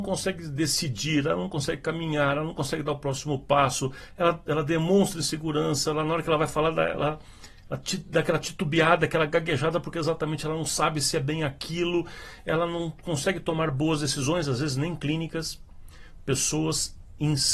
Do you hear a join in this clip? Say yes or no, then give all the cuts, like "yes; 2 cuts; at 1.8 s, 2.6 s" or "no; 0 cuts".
no; 0 cuts